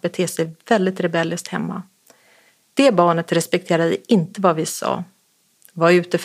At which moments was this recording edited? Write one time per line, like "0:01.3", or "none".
none